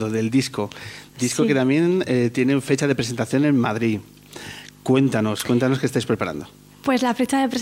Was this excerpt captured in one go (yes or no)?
yes